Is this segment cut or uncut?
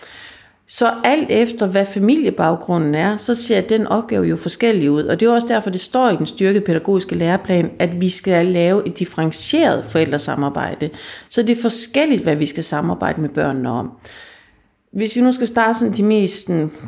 uncut